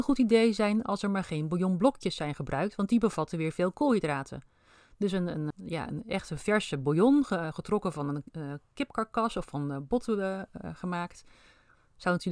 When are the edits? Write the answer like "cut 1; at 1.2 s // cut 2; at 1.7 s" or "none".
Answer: cut 1; at 5.5 s